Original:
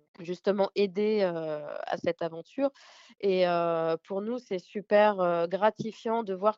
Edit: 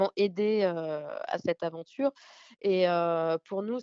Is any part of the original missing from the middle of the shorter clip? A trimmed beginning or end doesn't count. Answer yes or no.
no